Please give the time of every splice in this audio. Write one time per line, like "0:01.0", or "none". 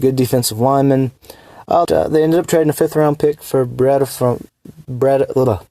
0:01.8